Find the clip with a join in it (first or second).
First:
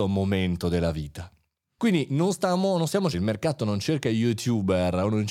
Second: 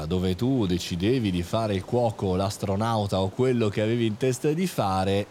first